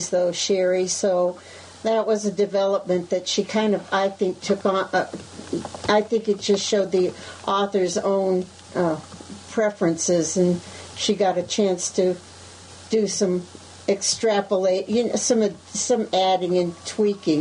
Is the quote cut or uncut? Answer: uncut